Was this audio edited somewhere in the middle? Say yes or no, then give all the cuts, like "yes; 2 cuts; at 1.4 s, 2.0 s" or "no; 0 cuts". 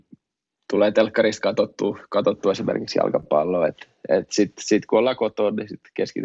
no; 0 cuts